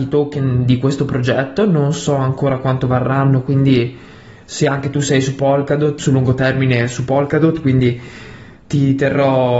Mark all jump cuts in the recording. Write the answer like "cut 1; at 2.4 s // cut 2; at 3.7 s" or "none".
cut 1; at 6.0 s